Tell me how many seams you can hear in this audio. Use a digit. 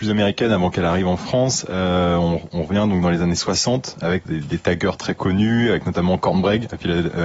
1